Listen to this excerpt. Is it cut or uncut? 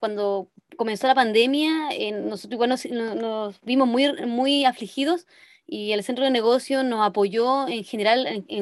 uncut